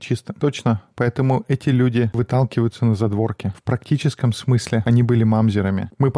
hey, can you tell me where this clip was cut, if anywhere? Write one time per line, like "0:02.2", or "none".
none